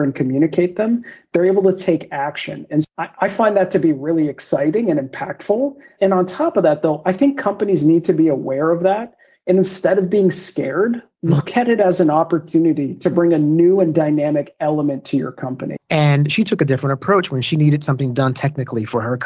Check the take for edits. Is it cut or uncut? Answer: cut